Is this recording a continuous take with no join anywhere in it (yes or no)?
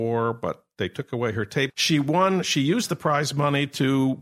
no